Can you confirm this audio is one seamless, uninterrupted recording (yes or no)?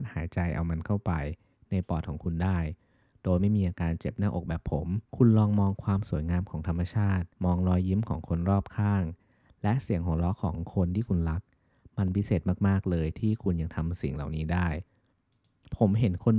no